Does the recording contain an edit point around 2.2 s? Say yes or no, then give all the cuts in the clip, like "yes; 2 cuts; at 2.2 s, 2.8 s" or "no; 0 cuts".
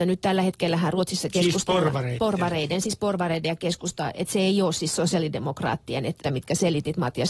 no; 1 cut; at 6.2 s